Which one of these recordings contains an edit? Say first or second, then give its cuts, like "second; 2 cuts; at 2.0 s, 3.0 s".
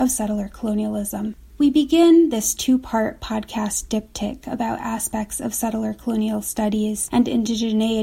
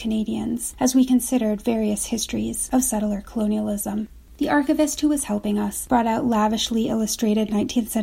first; 1 cut; at 1.5 s